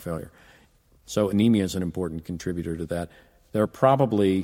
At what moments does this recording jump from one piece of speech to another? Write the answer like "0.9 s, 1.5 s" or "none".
none